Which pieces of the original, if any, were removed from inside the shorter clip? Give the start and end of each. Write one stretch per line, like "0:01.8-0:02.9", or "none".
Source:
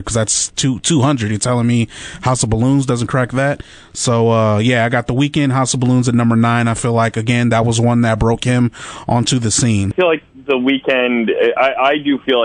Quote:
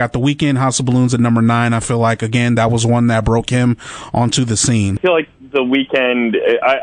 none